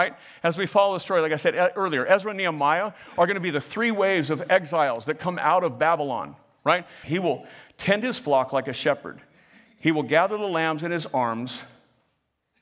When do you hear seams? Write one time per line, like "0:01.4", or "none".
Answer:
0:07.0